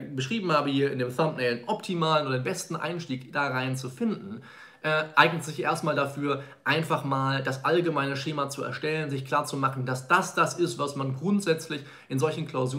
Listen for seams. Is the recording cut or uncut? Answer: uncut